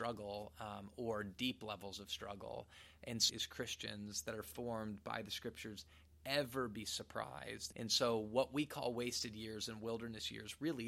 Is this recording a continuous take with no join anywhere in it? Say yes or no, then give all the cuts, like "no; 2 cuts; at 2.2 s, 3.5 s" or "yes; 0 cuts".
no; 2 cuts; at 3.3 s, 7.7 s